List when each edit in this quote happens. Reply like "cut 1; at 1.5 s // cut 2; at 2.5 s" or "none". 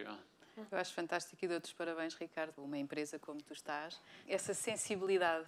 cut 1; at 2.6 s // cut 2; at 4.3 s